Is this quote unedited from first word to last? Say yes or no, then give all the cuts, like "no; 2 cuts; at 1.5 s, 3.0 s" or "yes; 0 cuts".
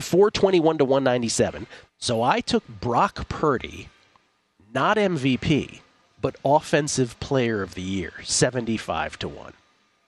no; 1 cut; at 1.9 s